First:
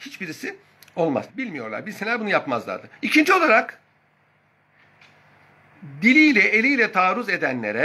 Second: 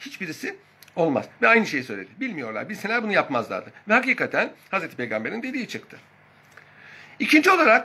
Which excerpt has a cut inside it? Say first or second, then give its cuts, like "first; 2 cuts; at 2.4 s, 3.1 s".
first; 2 cuts; at 1.3 s, 3.0 s